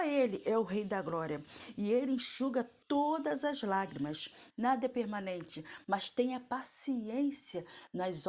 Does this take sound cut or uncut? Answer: cut